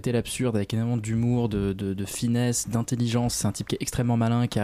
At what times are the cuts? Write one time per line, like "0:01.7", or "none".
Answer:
none